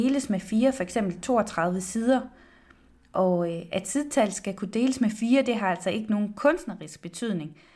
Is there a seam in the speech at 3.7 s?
no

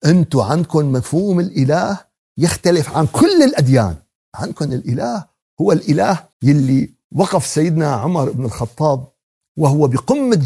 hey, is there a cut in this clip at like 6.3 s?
yes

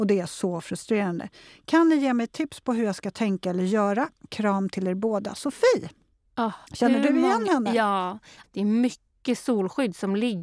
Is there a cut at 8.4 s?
yes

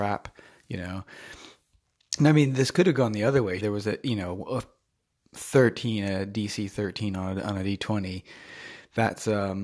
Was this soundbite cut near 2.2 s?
no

